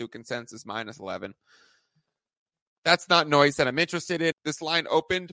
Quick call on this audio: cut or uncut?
cut